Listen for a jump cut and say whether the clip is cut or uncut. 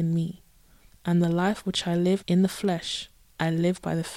cut